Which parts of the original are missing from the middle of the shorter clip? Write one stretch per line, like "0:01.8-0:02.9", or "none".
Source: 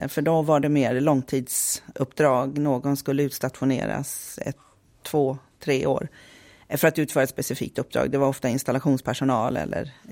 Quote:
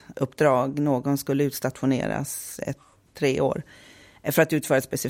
0:04.9-0:05.5